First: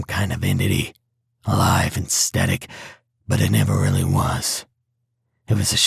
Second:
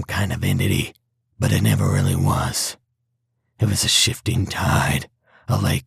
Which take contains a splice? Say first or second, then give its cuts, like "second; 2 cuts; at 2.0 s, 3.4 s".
second; 1 cut; at 1.3 s